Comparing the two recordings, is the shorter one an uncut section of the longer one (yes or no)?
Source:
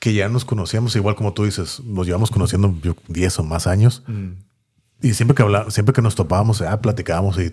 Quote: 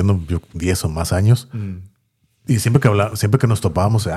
yes